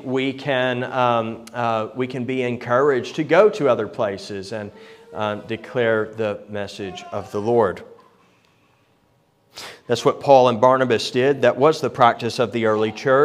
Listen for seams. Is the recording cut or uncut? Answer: uncut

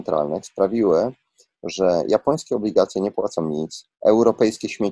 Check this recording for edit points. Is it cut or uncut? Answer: cut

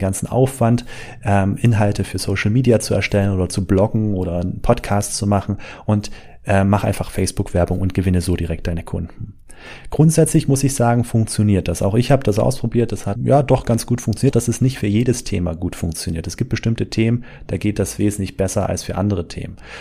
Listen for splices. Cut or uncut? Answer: cut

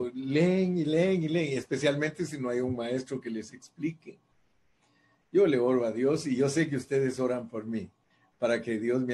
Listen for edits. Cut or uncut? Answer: uncut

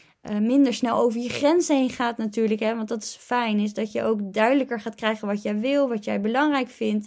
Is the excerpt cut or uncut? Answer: uncut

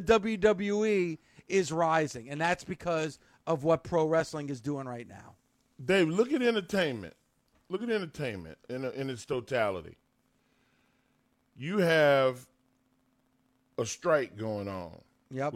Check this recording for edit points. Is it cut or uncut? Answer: uncut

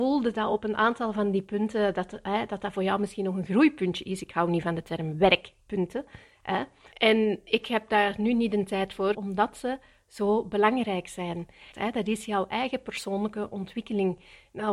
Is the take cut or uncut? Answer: cut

